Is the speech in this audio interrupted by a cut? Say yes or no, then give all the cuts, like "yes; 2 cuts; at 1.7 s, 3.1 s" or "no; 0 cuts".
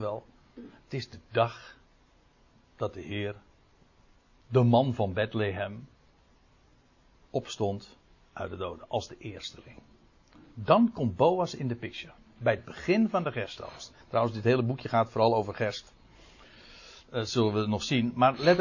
no; 0 cuts